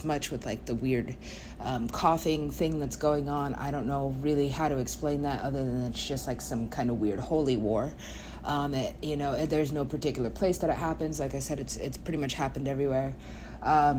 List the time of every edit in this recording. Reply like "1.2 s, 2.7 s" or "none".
none